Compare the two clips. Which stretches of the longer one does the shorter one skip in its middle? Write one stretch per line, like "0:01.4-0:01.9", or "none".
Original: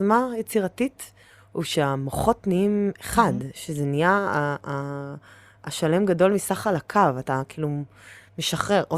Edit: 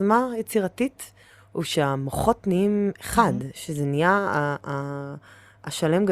none